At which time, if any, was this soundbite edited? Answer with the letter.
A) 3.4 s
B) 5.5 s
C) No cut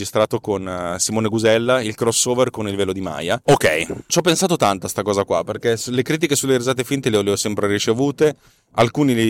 A